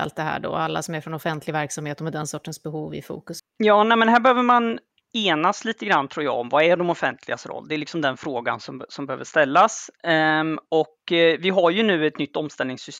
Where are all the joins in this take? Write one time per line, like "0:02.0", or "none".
0:03.4